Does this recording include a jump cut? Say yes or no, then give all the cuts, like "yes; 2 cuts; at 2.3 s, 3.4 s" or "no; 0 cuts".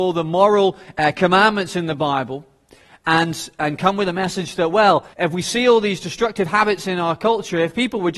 yes; 1 cut; at 5.1 s